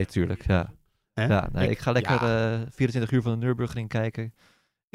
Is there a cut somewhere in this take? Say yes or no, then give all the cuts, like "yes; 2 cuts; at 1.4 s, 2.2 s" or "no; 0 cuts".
no; 0 cuts